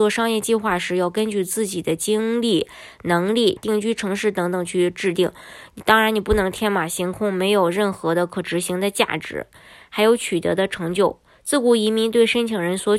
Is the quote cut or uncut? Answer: cut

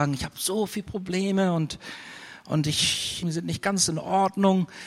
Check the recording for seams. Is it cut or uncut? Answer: cut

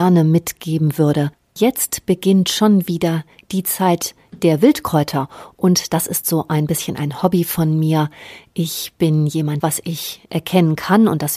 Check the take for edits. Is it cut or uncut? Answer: cut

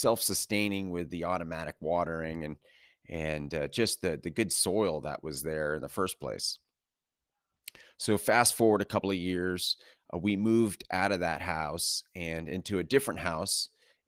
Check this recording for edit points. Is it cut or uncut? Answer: uncut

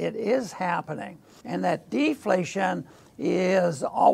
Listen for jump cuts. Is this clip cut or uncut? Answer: cut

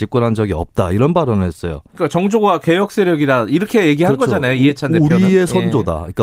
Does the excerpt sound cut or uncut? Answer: uncut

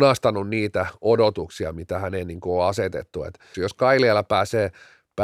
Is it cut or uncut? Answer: cut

